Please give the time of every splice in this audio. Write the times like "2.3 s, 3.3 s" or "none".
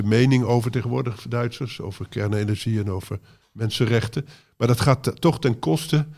none